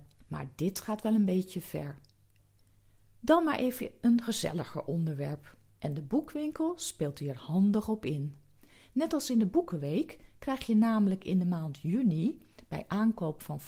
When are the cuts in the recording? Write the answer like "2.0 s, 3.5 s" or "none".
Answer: 5.8 s